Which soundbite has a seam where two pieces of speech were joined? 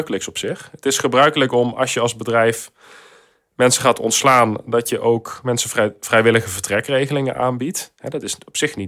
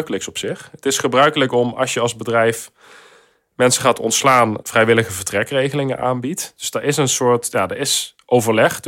second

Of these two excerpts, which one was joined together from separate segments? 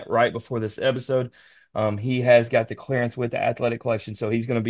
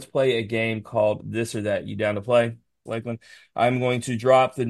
second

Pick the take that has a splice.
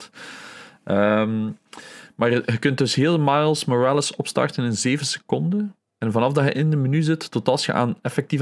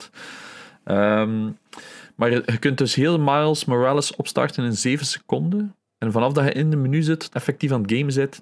second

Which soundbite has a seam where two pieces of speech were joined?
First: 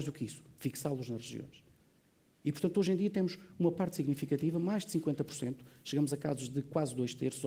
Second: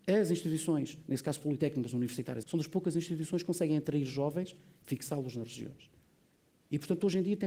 second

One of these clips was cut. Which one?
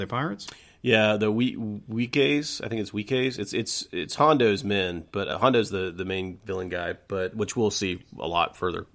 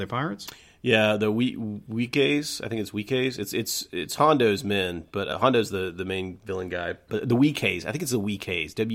second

